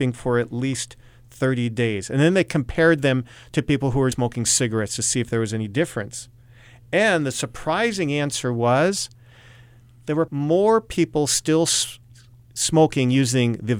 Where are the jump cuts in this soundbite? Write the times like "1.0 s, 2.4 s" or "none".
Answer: 4.1 s, 10.3 s

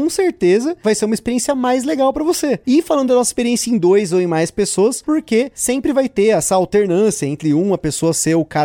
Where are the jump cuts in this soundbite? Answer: 2.6 s, 5.0 s

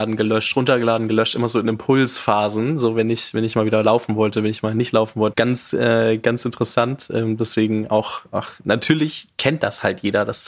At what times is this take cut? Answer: 5.3 s

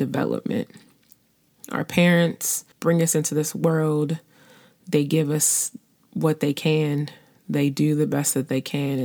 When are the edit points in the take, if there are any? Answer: 2.7 s

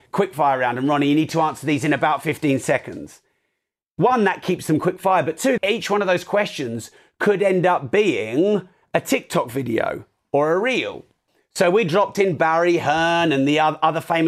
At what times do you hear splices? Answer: 5.6 s

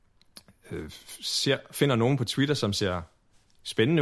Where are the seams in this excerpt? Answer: none

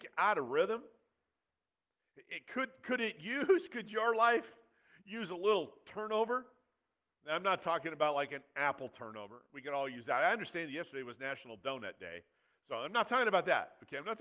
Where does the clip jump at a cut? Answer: none

